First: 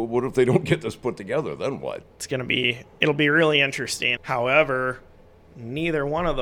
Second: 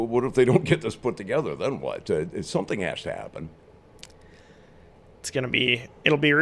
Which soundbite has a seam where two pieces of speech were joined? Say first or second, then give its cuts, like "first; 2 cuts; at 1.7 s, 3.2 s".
first; 2 cuts; at 2.0 s, 4.2 s